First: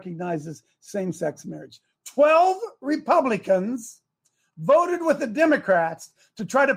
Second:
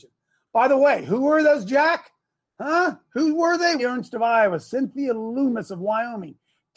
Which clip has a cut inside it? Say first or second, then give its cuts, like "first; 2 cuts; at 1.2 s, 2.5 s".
second; 1 cut; at 3.8 s